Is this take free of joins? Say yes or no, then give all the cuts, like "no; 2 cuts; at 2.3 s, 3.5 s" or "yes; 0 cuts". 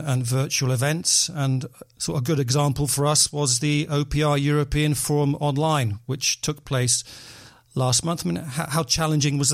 yes; 0 cuts